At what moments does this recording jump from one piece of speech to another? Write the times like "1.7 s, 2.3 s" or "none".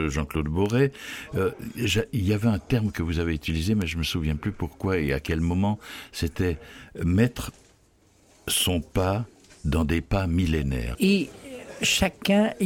10.9 s